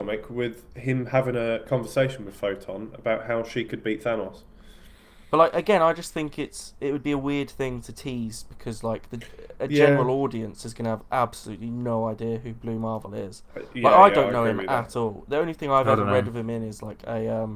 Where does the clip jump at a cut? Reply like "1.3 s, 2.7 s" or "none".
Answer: none